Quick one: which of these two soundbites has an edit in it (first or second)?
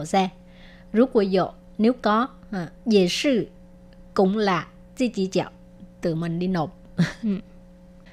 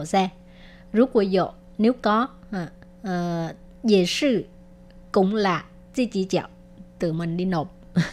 first